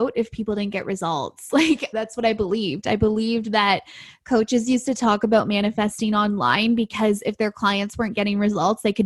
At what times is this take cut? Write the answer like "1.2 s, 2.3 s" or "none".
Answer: 1.9 s